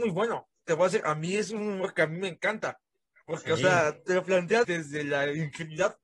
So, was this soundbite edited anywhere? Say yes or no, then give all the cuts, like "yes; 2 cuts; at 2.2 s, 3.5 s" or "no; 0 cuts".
yes; 1 cut; at 4.6 s